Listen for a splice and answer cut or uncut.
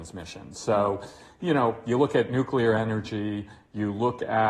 uncut